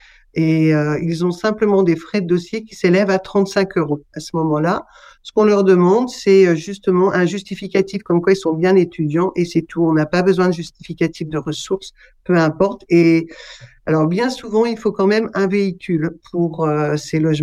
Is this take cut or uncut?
uncut